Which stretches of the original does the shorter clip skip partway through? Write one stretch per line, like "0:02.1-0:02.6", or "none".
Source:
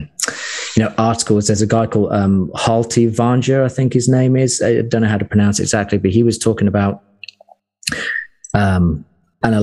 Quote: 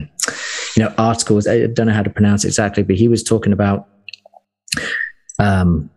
0:01.4-0:04.6